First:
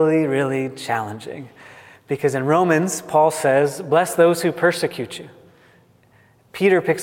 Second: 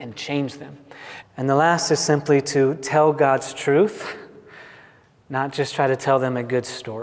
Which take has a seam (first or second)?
second